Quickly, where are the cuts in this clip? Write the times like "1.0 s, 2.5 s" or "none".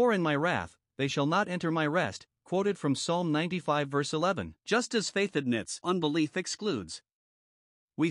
4.6 s, 5.8 s